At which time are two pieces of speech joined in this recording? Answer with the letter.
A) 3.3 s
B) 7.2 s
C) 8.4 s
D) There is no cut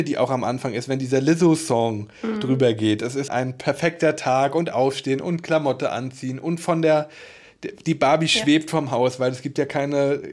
A